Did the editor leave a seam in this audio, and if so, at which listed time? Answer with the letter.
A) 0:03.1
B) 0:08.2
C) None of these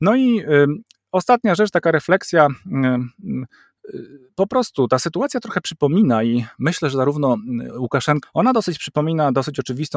B